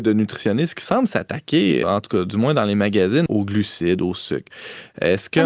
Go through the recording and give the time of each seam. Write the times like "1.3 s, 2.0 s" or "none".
1.8 s, 3.3 s